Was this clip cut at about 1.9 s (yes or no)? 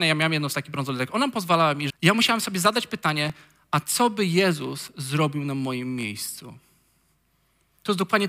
yes